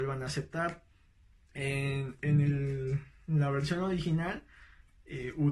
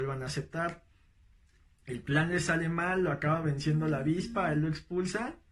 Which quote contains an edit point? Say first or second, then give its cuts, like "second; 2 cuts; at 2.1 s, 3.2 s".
first; 1 cut; at 1.5 s